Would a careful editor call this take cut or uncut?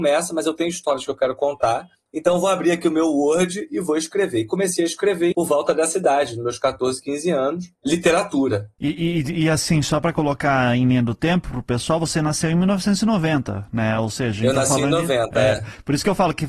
cut